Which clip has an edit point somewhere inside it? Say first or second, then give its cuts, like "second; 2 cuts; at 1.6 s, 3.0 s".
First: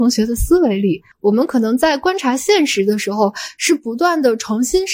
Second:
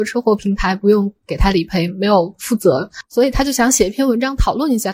first; 1 cut; at 1.1 s